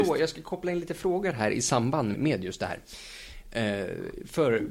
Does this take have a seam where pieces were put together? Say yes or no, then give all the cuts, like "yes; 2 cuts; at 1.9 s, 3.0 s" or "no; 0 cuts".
yes; 1 cut; at 2.1 s